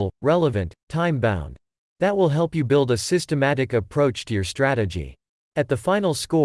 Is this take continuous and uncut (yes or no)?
yes